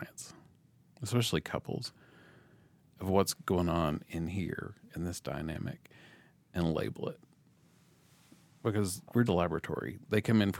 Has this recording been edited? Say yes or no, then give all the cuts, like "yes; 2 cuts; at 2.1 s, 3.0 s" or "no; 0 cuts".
yes; 1 cut; at 9.3 s